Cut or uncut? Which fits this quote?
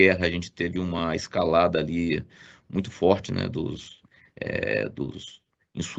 uncut